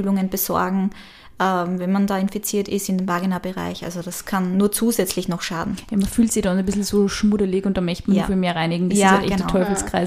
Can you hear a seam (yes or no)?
no